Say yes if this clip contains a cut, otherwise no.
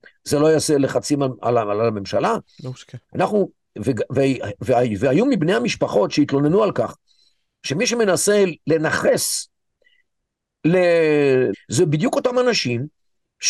yes